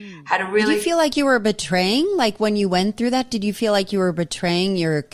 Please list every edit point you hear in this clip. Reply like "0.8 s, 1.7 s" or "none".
none